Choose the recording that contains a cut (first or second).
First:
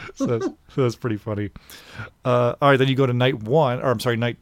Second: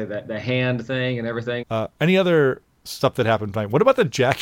second